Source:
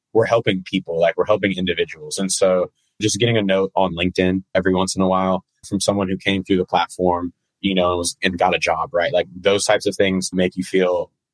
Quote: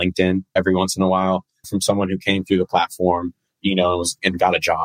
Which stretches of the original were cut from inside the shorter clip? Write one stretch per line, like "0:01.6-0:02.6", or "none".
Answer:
none